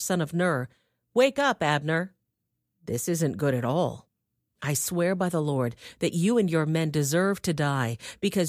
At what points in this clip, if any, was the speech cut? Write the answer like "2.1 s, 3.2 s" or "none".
2.7 s